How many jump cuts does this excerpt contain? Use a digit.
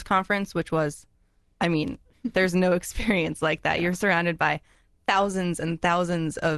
0